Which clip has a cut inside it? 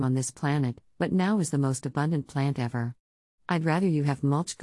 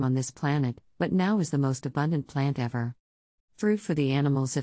second; 1 cut; at 3.4 s

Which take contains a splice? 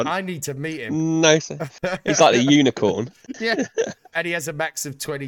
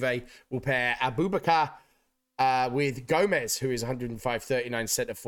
first; 1 cut; at 4.1 s

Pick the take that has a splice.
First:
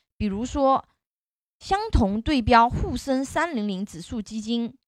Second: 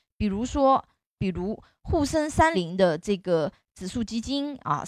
second; 2 cuts; at 1.2 s, 2.5 s

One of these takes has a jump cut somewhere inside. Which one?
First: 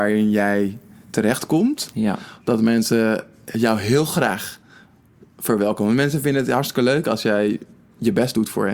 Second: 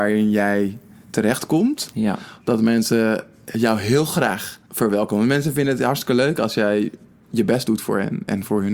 second; 1 cut; at 4.7 s

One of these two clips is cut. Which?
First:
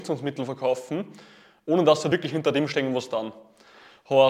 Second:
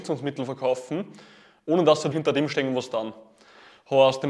second; 1 cut; at 2.1 s

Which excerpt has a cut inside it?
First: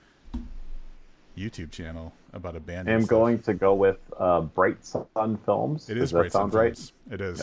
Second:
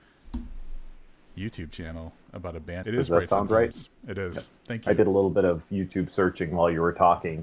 second; 1 cut; at 2.8 s

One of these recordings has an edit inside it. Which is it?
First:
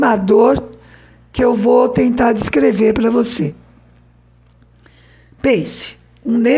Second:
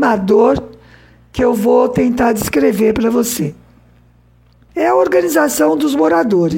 second; 1 cut; at 4.7 s

